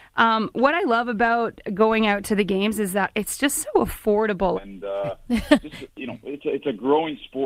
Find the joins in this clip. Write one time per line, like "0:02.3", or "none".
0:04.6